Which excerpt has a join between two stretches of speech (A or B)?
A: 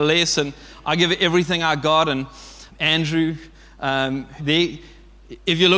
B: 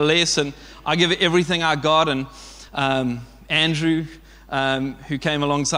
A